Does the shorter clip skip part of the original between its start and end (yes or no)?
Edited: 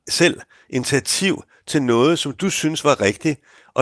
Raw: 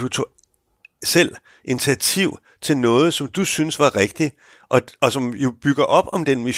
no